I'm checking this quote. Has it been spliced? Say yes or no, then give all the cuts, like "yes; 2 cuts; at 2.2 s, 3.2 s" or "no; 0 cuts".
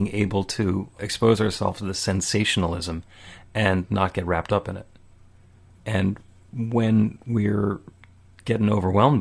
no; 0 cuts